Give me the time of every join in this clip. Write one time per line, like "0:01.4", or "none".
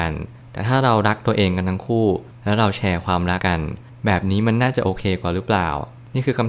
0:03.4